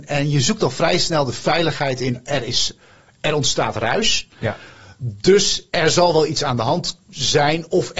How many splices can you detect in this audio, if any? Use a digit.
0